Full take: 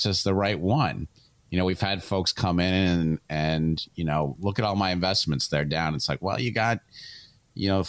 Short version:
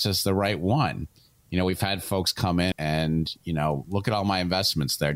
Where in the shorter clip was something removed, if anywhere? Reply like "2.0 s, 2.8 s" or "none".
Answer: 2.7 s